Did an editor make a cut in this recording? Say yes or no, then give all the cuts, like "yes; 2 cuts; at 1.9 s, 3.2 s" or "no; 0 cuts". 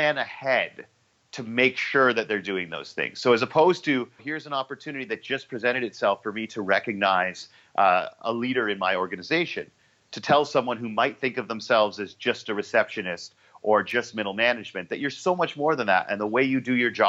yes; 1 cut; at 4.2 s